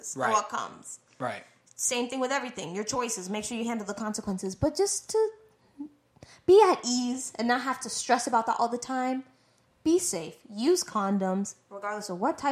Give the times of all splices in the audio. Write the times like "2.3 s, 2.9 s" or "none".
none